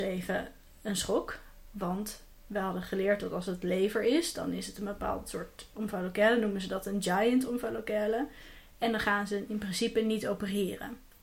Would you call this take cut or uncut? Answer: uncut